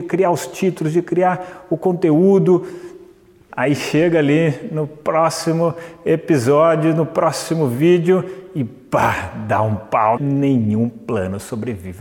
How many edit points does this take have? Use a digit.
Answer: 2